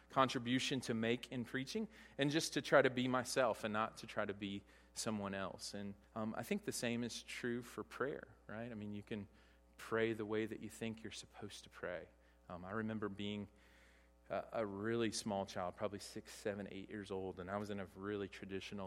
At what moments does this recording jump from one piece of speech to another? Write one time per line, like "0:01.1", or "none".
0:06.0